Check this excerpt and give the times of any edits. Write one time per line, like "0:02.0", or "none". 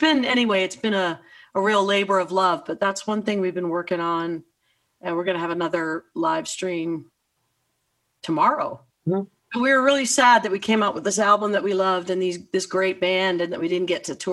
0:08.9